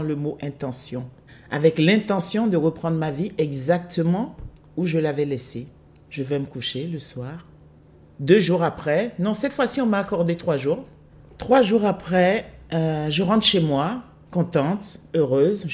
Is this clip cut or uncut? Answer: cut